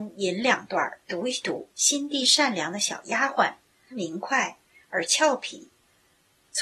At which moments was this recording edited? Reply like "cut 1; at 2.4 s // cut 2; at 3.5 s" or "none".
cut 1; at 1.7 s // cut 2; at 3.9 s